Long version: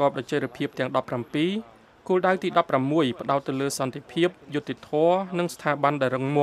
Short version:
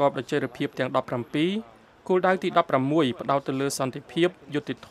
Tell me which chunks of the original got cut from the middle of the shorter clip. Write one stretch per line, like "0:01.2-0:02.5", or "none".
none